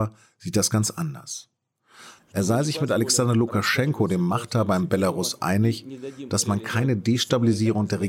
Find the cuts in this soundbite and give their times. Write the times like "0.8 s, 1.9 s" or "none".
2.2 s